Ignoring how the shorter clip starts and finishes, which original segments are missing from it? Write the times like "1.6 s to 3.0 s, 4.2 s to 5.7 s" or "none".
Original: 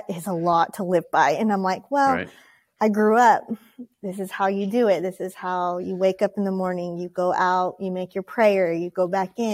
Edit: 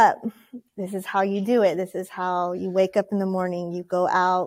none